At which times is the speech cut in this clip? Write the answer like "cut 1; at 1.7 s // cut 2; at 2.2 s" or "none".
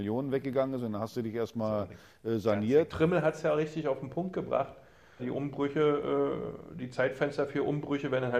cut 1; at 2.9 s // cut 2; at 5.2 s